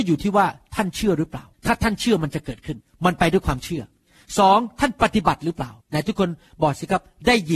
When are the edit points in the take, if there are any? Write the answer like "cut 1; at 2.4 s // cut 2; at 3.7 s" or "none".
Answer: cut 1; at 1.5 s // cut 2; at 5.8 s